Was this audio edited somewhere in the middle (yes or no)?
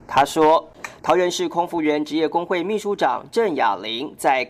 yes